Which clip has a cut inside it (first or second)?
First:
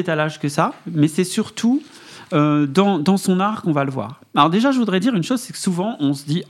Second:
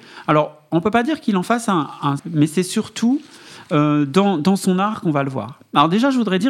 second